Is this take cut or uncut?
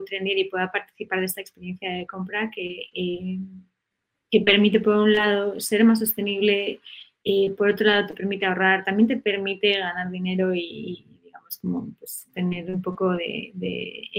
uncut